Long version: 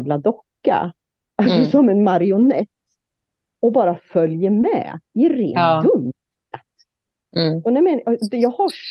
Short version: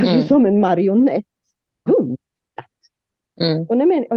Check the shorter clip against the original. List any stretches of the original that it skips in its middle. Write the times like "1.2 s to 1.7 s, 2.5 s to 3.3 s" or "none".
3.3 s to 5.8 s